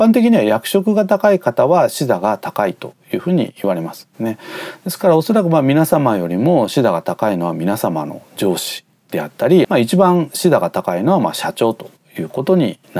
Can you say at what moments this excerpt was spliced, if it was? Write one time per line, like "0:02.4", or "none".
0:09.6